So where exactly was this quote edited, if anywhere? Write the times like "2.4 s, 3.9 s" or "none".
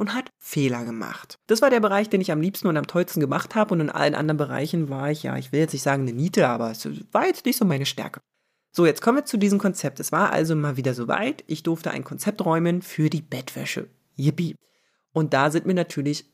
1.4 s